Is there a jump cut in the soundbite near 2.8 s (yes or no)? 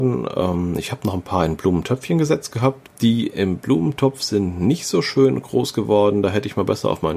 yes